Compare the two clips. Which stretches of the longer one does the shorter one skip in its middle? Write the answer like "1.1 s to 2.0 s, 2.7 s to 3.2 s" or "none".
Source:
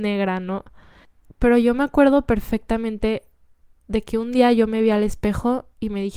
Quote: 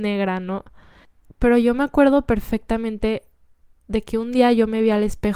none